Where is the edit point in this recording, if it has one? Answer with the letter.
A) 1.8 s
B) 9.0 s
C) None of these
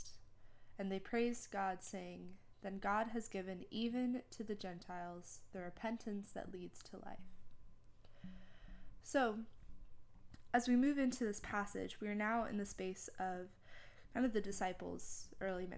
B